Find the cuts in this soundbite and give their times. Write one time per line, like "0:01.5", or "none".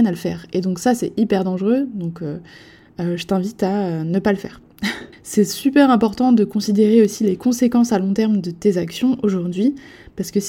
0:05.1